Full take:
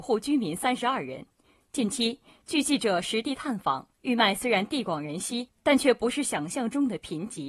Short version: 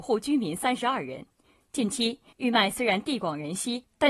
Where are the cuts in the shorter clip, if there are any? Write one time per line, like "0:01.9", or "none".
0:02.3